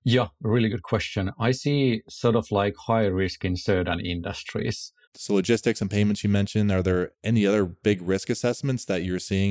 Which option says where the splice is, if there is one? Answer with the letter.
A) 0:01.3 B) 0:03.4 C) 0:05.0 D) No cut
C